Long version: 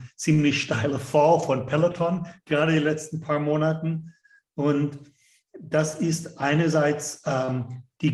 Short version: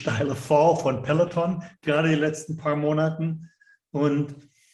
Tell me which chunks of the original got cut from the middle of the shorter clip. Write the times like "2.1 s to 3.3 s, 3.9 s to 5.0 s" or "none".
none